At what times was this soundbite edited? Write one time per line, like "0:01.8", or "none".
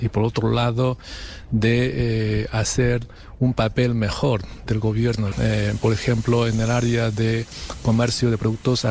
0:05.3

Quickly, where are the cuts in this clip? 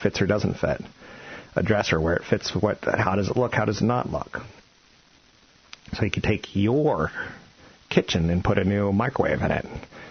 none

